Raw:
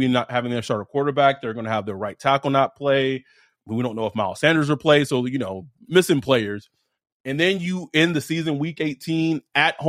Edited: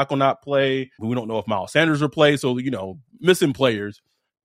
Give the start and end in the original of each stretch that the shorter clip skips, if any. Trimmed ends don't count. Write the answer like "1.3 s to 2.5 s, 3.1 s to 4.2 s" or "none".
3.3 s to 3.6 s